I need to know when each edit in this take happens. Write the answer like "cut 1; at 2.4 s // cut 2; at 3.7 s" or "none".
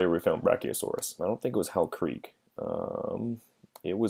cut 1; at 1.2 s

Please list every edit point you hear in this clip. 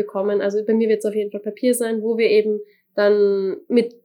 none

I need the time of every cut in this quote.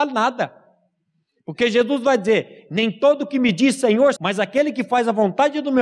cut 1; at 4.2 s

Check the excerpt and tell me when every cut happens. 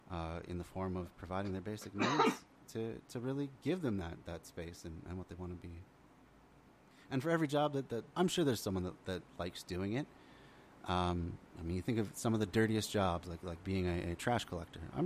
cut 1; at 5.1 s // cut 2; at 8.1 s

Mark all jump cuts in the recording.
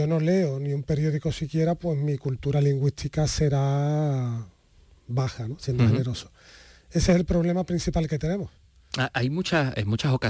none

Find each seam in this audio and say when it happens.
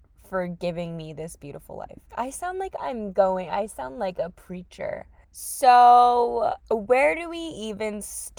cut 1; at 5.2 s // cut 2; at 6.6 s

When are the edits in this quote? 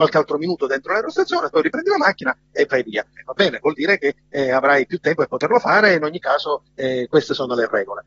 cut 1; at 3.2 s

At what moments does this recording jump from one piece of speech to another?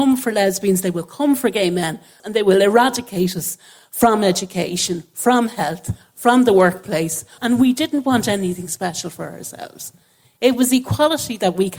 cut 1; at 2.2 s // cut 2; at 7.4 s

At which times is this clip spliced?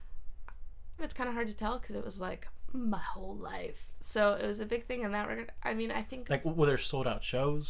cut 1; at 1.0 s

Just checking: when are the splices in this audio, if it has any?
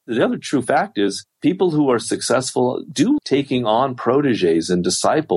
cut 1; at 3.2 s

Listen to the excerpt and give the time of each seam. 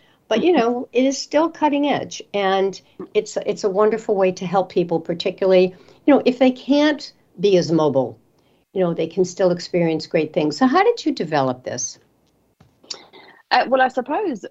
none

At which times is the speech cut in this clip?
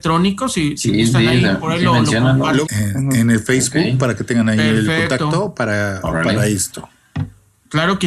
cut 1; at 2.6 s

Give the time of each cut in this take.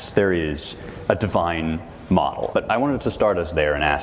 cut 1; at 2.5 s

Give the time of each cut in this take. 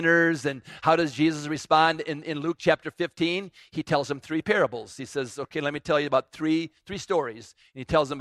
none

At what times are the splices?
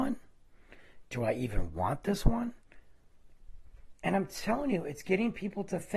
none

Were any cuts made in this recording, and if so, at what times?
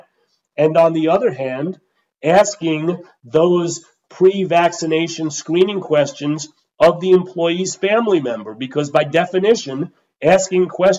none

